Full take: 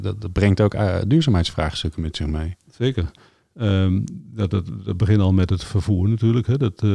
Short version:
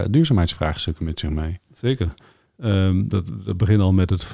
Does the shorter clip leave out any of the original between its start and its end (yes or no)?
yes